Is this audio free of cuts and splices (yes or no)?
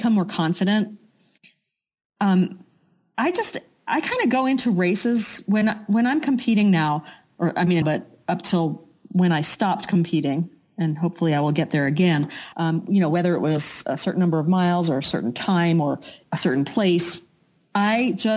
no